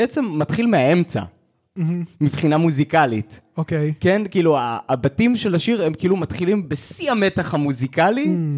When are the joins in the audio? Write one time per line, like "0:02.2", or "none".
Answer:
none